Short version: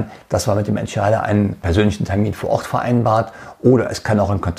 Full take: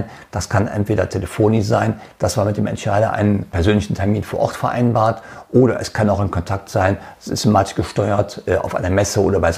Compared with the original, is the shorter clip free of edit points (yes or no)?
yes